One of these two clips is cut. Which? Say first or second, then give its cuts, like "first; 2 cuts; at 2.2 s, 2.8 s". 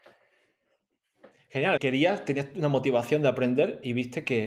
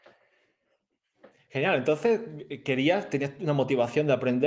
first; 1 cut; at 1.8 s